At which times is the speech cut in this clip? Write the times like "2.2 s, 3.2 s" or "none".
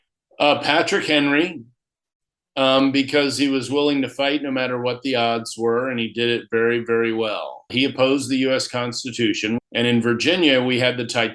7.7 s, 9.6 s